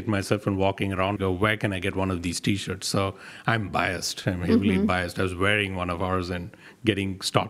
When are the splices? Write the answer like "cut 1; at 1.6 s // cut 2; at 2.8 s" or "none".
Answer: cut 1; at 1.2 s